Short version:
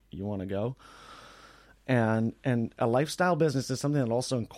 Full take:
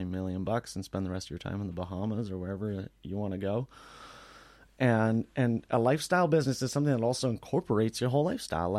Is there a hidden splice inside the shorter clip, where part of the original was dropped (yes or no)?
no